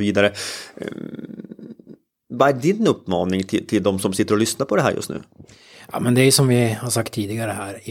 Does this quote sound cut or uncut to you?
uncut